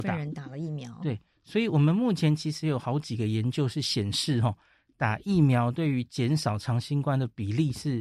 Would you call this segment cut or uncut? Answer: uncut